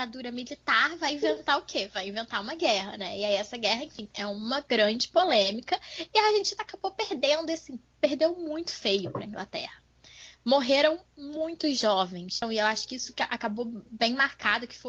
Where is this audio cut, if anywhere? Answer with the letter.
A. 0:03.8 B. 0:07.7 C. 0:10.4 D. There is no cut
D